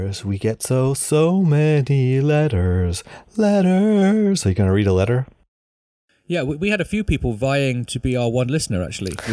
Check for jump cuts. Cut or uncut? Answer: uncut